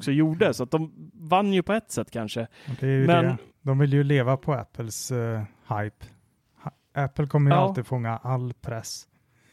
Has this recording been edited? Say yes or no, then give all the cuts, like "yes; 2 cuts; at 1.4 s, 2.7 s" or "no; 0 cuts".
yes; 1 cut; at 3.5 s